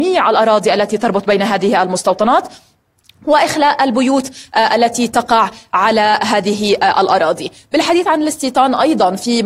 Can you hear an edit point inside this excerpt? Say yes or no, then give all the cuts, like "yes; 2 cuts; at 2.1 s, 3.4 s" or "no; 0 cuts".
no; 0 cuts